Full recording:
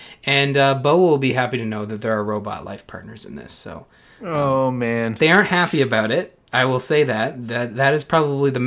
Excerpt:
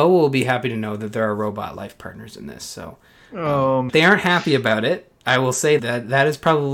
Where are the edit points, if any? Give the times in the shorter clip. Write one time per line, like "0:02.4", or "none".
0:03.9
0:05.8